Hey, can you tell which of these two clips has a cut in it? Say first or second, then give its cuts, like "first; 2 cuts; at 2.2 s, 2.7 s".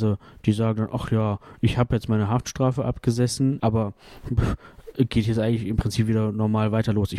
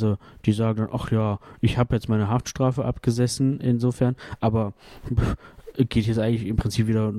first; 1 cut; at 3.6 s